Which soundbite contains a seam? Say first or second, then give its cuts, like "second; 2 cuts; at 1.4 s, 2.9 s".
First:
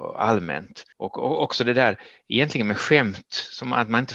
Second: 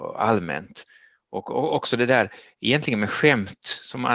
first; 1 cut; at 0.9 s